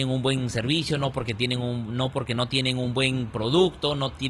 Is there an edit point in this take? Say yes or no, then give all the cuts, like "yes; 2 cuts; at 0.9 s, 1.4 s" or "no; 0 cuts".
no; 0 cuts